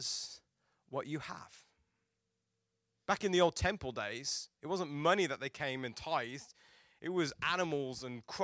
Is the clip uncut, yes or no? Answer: no